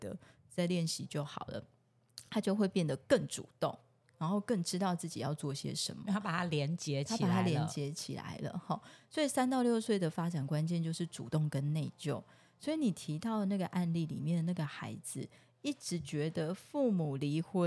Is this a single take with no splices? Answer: yes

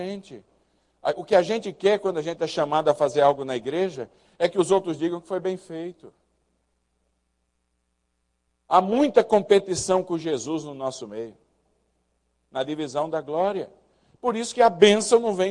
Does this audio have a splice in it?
no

